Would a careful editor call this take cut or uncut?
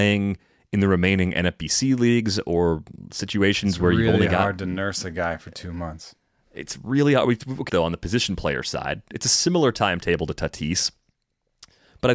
cut